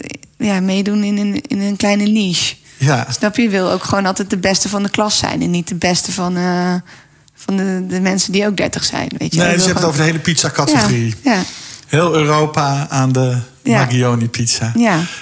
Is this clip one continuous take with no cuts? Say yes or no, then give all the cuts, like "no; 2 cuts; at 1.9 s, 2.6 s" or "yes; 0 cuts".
yes; 0 cuts